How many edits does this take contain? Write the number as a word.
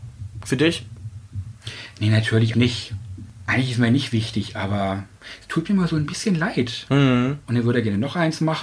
two